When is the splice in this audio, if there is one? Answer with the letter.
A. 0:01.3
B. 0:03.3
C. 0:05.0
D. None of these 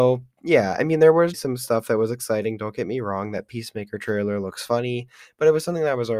A